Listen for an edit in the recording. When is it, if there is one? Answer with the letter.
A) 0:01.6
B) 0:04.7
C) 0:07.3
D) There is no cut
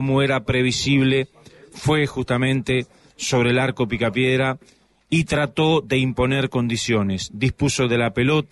D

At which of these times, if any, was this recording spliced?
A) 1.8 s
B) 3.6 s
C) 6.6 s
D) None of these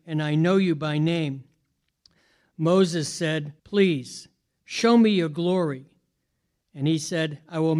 B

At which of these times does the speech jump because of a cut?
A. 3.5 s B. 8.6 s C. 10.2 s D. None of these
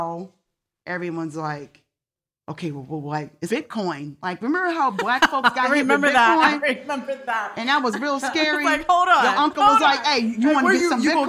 A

